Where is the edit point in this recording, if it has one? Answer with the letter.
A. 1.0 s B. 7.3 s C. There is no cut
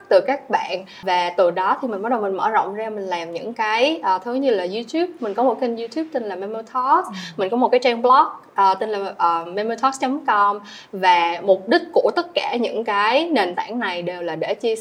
A